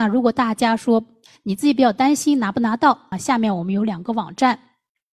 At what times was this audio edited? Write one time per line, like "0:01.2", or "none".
0:03.1